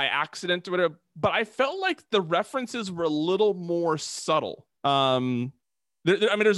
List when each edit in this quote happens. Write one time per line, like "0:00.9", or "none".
0:04.7